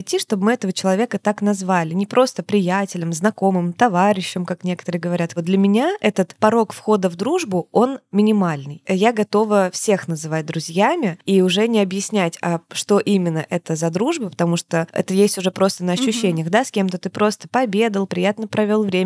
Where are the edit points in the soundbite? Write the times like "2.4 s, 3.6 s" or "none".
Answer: 18.1 s